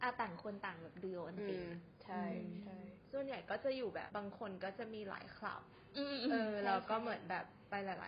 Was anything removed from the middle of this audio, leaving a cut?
yes; 1 cut; at 4.1 s

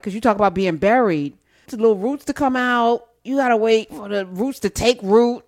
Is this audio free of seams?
no; 1 cut; at 1.7 s

